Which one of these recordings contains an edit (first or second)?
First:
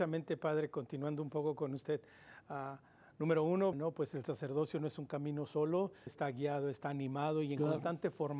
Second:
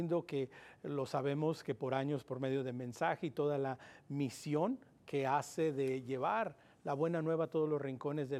first